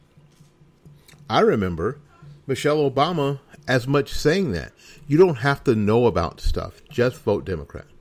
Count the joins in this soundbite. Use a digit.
0